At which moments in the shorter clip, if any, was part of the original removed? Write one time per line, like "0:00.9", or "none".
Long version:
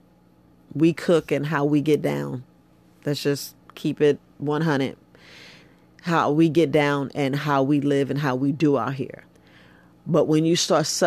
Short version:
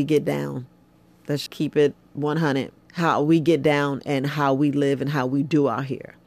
0:01.5
0:02.8